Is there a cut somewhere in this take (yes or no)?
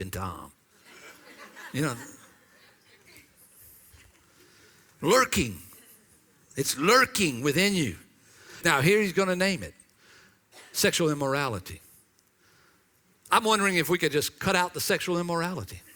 yes